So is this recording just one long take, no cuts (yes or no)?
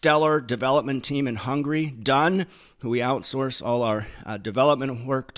yes